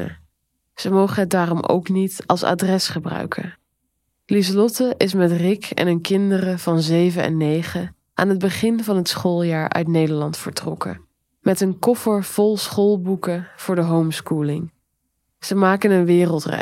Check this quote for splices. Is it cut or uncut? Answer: cut